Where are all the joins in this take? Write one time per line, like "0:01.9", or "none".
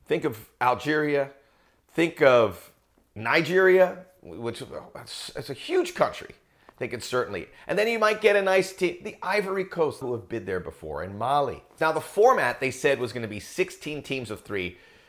0:10.0
0:11.8